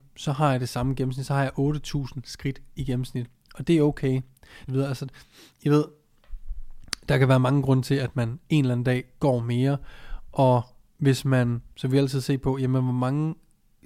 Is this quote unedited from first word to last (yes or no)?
no